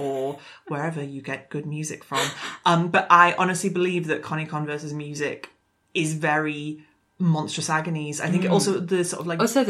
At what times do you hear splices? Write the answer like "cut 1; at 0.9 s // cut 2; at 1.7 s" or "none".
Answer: none